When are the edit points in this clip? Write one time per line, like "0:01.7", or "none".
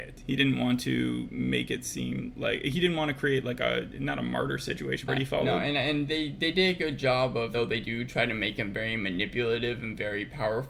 0:05.1
0:07.5